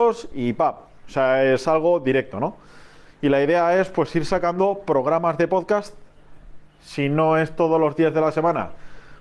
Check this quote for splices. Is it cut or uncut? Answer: uncut